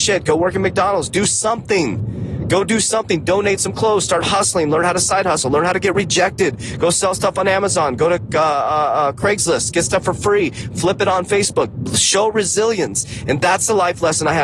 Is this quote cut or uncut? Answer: uncut